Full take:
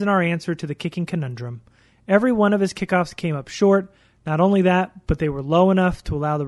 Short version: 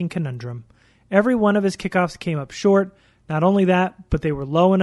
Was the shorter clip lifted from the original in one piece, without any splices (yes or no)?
yes